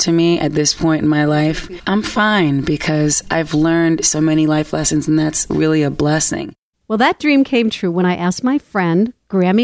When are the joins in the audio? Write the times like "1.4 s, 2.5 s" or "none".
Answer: 6.7 s